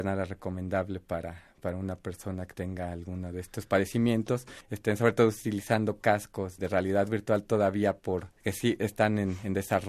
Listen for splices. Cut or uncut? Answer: cut